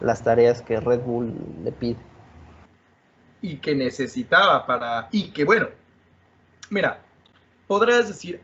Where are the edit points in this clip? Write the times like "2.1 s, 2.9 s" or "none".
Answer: none